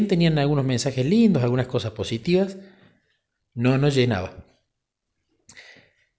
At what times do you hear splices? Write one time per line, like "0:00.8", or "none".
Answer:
none